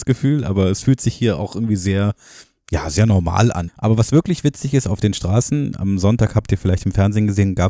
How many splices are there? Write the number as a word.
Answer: one